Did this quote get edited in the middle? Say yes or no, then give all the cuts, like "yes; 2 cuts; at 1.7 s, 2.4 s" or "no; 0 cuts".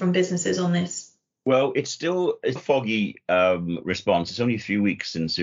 yes; 1 cut; at 2.6 s